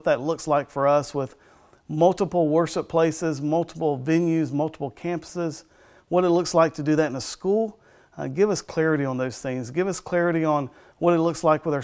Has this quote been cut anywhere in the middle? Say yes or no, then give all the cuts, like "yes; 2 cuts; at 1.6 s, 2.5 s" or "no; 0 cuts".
no; 0 cuts